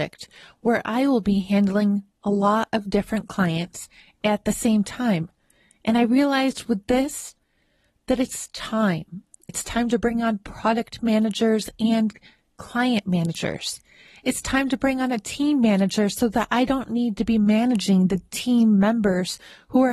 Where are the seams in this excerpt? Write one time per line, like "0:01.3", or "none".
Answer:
0:09.5